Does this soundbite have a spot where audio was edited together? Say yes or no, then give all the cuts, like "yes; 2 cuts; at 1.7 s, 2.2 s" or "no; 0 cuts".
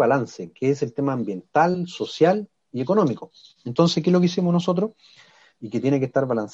no; 0 cuts